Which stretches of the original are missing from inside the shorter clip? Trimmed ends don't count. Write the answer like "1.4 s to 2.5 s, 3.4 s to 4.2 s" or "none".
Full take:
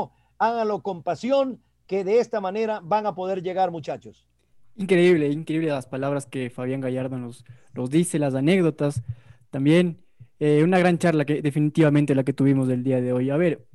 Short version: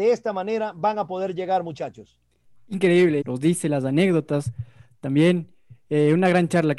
5.3 s to 7.7 s